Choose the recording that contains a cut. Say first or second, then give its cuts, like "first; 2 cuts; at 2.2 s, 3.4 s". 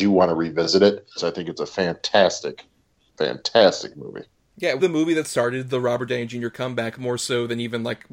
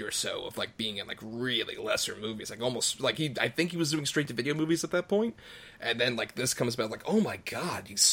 first; 2 cuts; at 1.2 s, 4.8 s